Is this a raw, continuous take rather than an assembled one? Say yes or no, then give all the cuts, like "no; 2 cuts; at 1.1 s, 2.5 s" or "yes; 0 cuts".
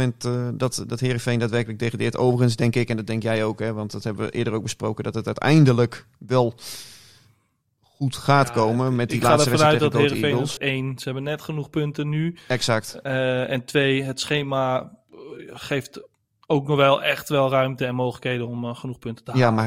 no; 1 cut; at 10.6 s